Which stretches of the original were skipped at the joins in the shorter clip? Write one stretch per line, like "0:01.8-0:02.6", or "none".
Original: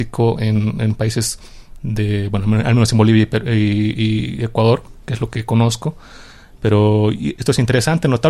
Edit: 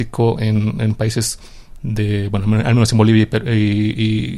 none